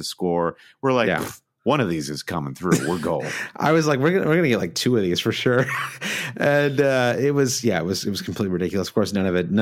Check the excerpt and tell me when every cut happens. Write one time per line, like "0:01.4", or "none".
none